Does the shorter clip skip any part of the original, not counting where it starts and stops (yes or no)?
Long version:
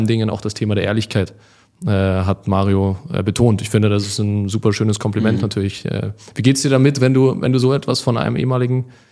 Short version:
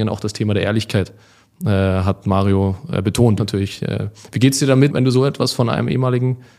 yes